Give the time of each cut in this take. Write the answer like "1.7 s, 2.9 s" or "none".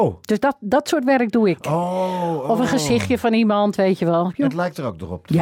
4.3 s